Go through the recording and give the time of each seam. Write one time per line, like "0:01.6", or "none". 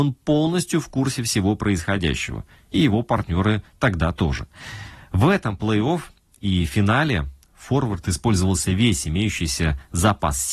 none